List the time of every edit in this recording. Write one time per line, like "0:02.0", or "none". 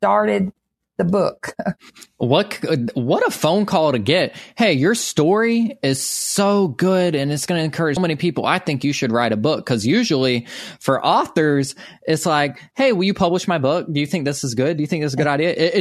0:08.0